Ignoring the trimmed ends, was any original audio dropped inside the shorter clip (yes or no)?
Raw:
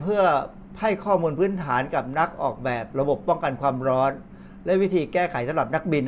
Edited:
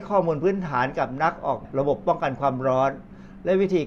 yes